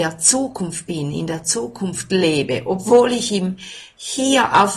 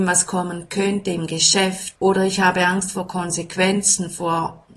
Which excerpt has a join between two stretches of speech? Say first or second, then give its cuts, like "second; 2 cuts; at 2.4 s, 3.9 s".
second; 1 cut; at 1.9 s